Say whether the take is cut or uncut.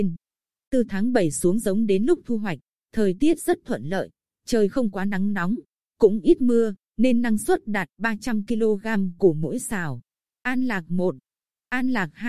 cut